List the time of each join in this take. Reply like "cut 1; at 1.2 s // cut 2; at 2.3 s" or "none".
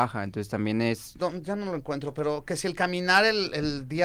cut 1; at 1.2 s